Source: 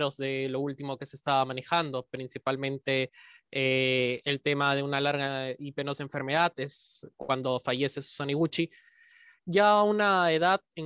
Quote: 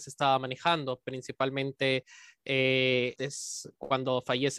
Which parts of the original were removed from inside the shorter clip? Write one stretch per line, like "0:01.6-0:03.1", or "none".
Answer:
0:04.2-0:06.5